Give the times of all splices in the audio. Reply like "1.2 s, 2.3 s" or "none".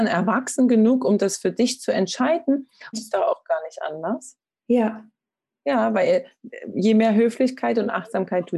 2.9 s